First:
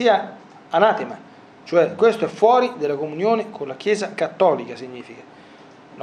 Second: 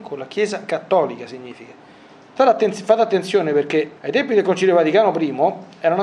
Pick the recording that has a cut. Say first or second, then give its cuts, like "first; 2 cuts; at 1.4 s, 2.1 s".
second; 2 cuts; at 2.4 s, 4.0 s